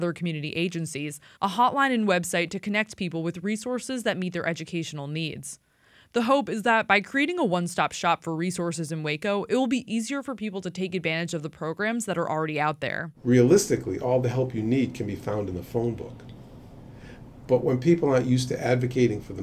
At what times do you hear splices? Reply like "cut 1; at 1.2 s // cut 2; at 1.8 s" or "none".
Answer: cut 1; at 1.4 s

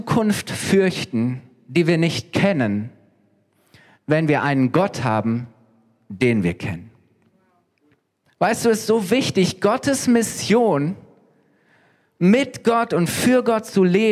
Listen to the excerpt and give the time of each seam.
cut 1; at 8.3 s

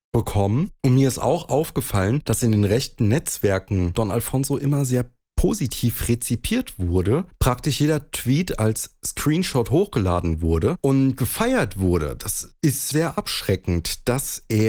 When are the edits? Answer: cut 1; at 3.9 s // cut 2; at 12.9 s

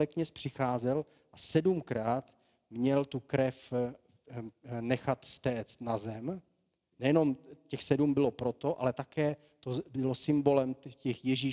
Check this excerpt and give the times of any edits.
cut 1; at 6.9 s

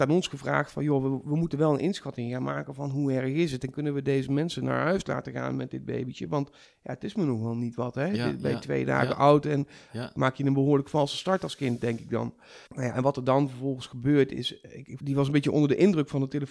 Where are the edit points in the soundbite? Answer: cut 1; at 12.7 s // cut 2; at 15.0 s

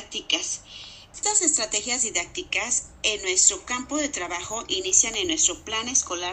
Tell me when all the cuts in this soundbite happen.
cut 1; at 1.1 s

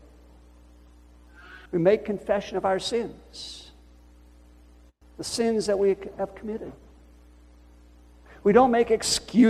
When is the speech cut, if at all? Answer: cut 1; at 1.7 s

